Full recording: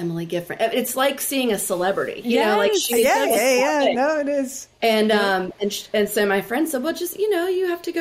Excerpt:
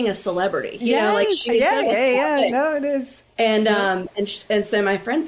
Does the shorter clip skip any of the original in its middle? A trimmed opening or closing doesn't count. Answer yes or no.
no